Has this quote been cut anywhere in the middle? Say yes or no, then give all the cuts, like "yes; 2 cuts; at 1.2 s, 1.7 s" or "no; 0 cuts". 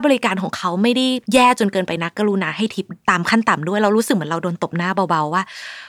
yes; 2 cuts; at 1.2 s, 3.0 s